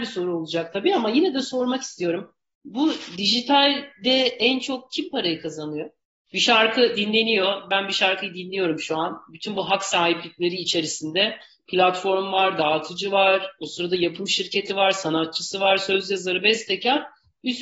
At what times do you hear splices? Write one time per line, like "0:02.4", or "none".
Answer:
none